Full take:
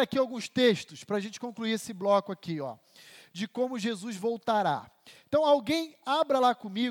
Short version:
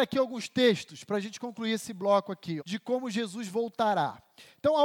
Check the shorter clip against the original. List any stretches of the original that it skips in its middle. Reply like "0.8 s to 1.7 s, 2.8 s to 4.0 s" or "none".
2.6 s to 3.3 s